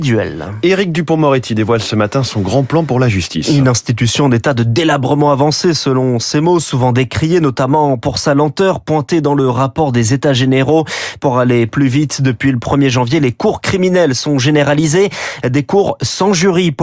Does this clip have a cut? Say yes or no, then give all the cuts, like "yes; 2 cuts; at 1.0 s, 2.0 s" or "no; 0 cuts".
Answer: no; 0 cuts